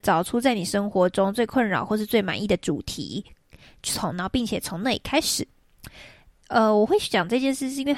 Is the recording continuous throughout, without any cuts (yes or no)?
yes